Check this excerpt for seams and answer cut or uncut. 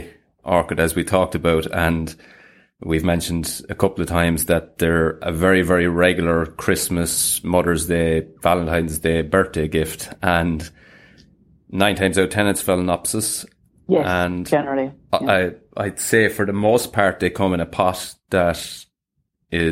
uncut